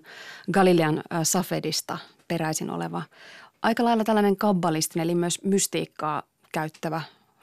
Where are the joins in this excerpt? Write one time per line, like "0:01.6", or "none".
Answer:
none